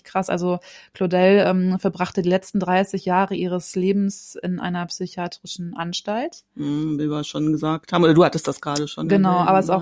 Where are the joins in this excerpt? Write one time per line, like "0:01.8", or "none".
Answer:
none